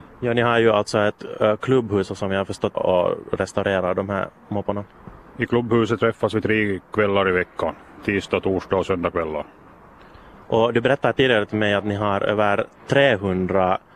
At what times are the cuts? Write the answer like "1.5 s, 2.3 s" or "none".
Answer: 2.7 s